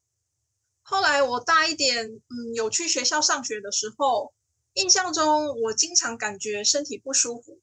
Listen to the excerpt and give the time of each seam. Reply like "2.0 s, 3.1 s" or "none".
none